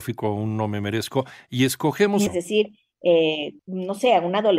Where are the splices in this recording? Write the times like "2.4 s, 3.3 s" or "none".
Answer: 2.3 s, 3.6 s